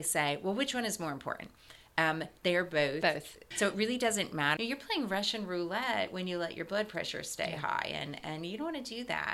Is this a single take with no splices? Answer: no; 2 cuts; at 3.5 s, 4.6 s

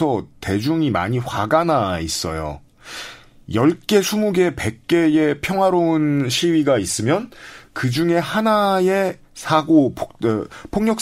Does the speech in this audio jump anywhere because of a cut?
no; 0 cuts

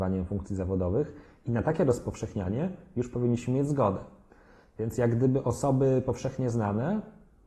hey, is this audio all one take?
yes; 0 cuts

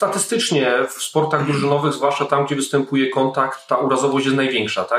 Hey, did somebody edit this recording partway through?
no; 0 cuts

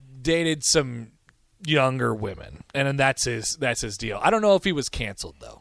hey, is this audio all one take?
no; 1 cut; at 2.7 s

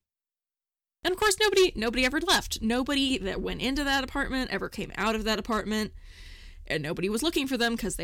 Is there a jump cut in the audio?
no; 0 cuts

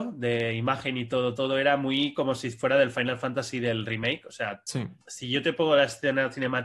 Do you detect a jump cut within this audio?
yes; 2 cuts; at 1.4 s, 5.0 s

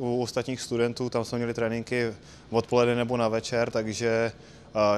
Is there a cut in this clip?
no; 0 cuts

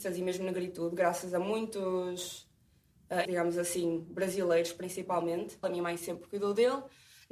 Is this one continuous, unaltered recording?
no; 2 cuts; at 3.2 s, 5.6 s

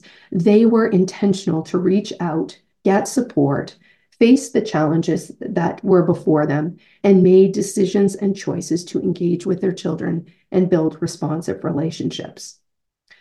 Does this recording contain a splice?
no; 0 cuts

